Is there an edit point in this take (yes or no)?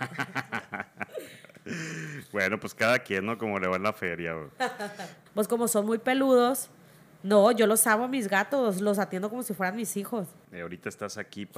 yes